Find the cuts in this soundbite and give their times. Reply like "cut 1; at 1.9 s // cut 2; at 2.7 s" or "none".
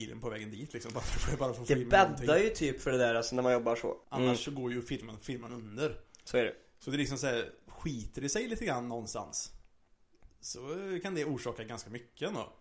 cut 1; at 4.0 s